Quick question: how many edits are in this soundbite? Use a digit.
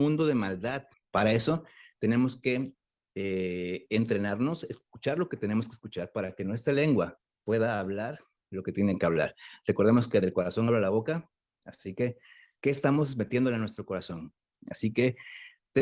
2